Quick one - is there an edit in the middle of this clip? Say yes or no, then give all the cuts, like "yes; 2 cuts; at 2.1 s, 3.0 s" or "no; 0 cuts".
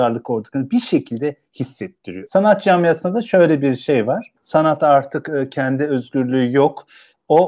yes; 2 cuts; at 2.3 s, 4.4 s